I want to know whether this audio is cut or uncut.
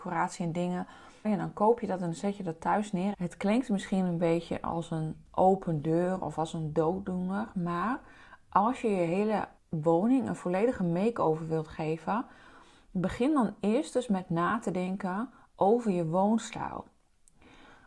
cut